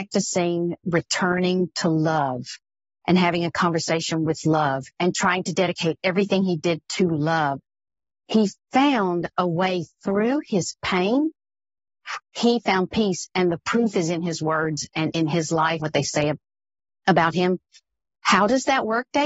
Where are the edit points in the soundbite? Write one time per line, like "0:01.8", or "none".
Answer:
0:12.2
0:15.8
0:18.2